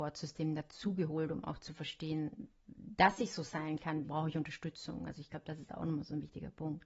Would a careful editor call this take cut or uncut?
cut